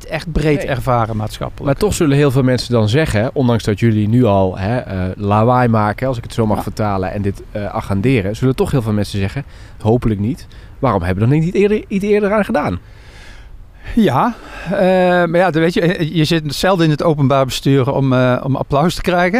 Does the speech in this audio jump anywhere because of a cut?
yes; 1 cut; at 9.8 s

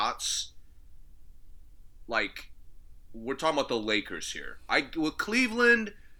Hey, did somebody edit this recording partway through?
no; 0 cuts

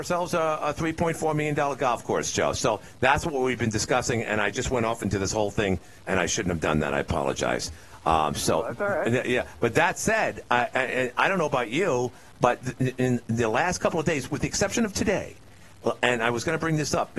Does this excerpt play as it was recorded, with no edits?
yes; 0 cuts

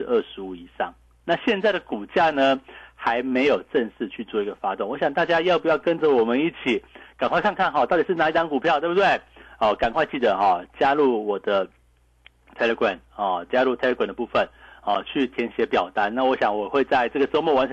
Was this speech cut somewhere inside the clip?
no; 0 cuts

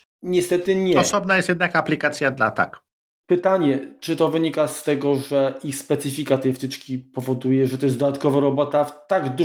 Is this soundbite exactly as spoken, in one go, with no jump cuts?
yes; 0 cuts

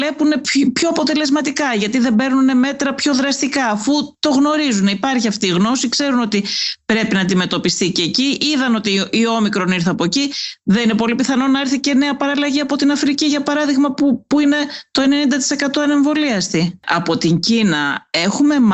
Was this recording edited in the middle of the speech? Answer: yes; 1 cut; at 16.8 s

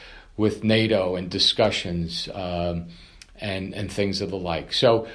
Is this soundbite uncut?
yes; 0 cuts

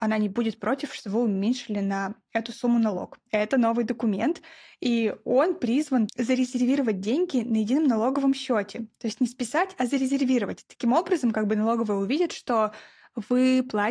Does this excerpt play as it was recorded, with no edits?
no; 2 cuts; at 3.3 s, 6.1 s

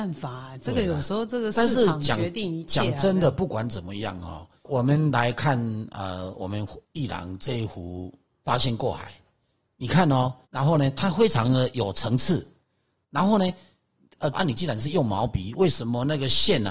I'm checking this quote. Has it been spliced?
yes; 2 cuts; at 10.4 s, 14.3 s

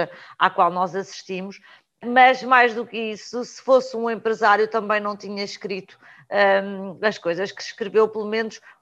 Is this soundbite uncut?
yes; 0 cuts

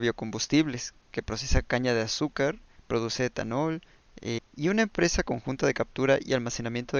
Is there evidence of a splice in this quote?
yes; 1 cut; at 4.4 s

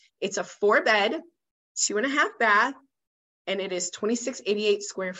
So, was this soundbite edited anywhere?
no; 0 cuts

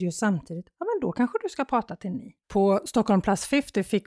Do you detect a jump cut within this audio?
yes; 1 cut; at 2.4 s

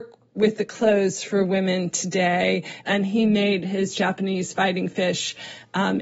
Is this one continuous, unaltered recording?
no; 1 cut; at 2.8 s

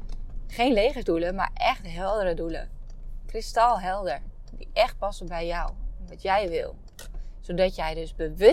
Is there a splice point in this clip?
no; 0 cuts

